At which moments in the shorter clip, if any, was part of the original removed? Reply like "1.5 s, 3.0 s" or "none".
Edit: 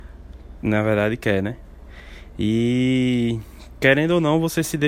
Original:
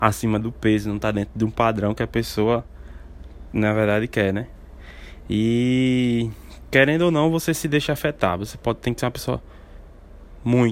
none